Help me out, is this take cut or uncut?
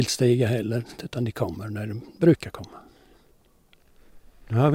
cut